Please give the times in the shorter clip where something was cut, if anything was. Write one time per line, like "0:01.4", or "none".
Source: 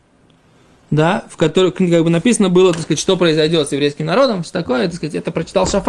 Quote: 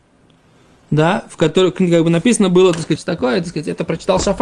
0:03.0